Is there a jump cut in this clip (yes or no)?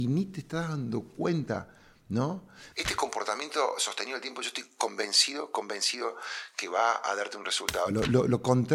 yes